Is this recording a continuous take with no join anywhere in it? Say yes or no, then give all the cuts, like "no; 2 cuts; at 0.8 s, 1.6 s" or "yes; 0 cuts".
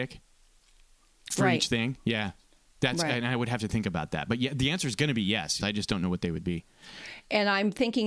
no; 1 cut; at 5.6 s